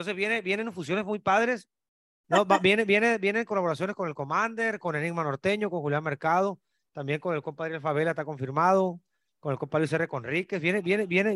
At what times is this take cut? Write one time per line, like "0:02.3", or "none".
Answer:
0:02.2